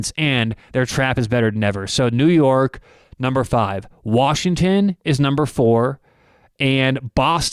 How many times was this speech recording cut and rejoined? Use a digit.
0